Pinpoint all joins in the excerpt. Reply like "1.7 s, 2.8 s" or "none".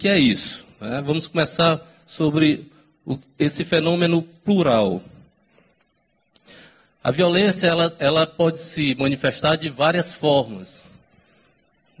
none